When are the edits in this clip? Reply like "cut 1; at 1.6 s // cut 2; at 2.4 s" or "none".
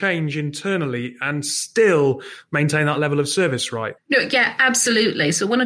cut 1; at 4.0 s